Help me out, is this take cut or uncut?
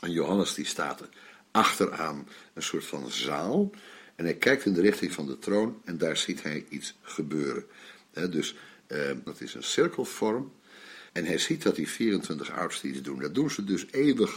cut